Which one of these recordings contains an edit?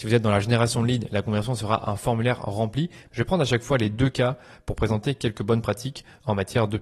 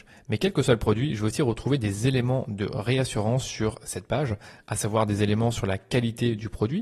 first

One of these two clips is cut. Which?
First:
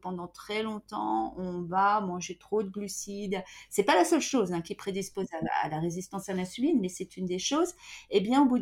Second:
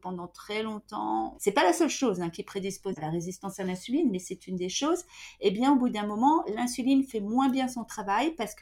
second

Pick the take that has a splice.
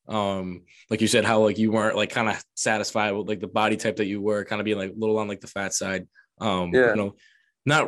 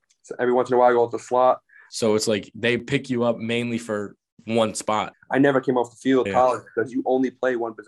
second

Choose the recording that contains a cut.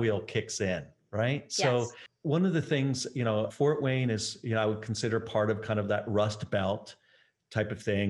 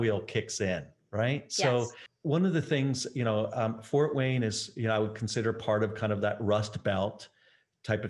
first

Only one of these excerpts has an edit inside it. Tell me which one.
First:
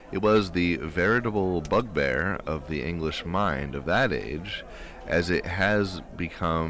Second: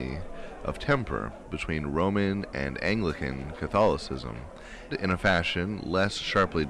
second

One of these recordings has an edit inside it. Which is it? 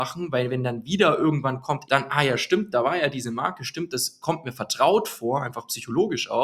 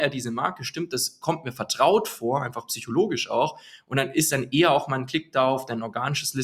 first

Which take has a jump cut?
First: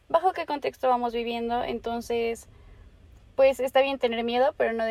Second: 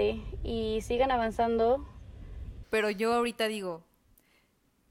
second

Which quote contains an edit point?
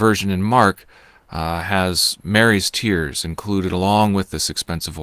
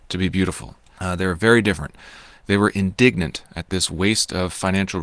second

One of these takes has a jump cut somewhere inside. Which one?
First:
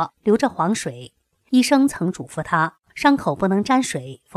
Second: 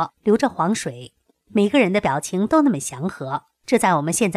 second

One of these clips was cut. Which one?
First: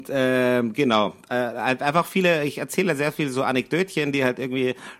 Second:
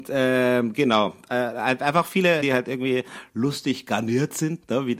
second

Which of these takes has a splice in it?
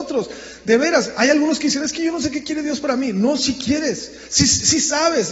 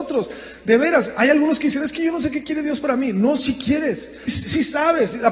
second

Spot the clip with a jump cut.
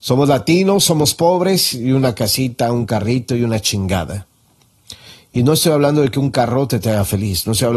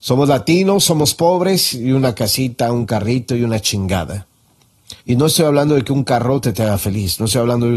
second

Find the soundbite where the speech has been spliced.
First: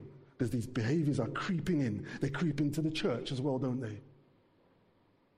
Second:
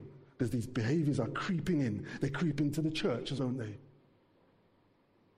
second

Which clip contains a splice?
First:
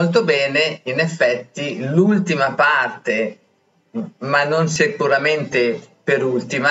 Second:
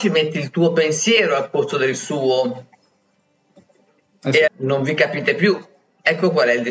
second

